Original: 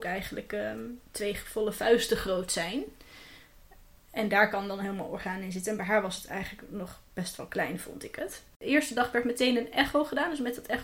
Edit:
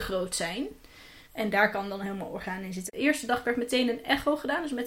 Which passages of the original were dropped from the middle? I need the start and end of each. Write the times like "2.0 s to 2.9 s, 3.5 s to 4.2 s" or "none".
3.4 s to 4.0 s, 5.6 s to 8.5 s